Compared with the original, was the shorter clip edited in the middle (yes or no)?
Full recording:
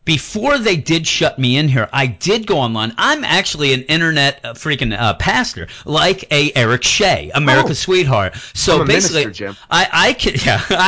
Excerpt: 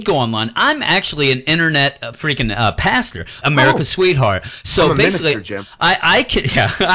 yes